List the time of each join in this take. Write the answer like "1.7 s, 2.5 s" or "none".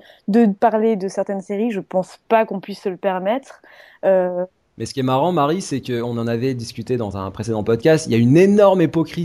none